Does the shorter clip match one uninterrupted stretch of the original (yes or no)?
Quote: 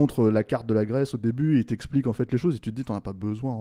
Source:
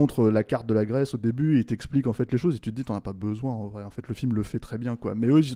yes